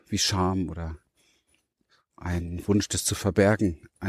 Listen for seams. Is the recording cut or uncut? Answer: uncut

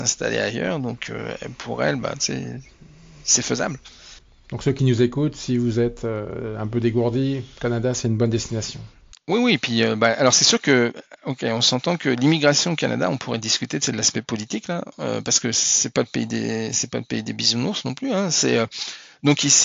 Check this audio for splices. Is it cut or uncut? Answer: uncut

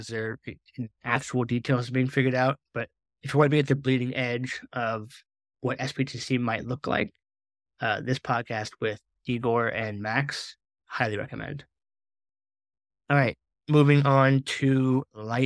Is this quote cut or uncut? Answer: uncut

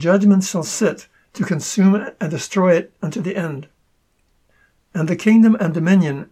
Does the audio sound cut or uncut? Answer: cut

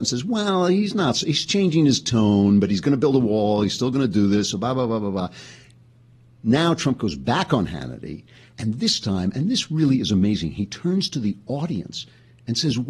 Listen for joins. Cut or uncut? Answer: uncut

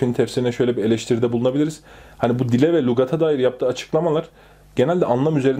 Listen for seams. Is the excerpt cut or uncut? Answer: uncut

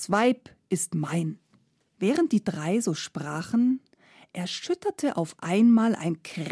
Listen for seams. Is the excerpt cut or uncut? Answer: uncut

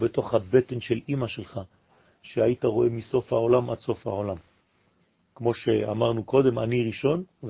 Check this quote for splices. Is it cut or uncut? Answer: cut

